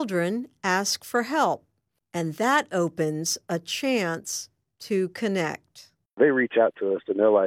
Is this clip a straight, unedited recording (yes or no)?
yes